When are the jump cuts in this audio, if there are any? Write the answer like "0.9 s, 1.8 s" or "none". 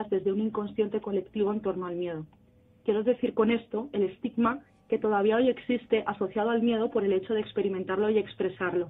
none